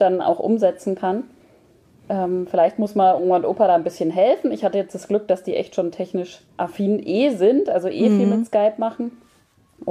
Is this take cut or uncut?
cut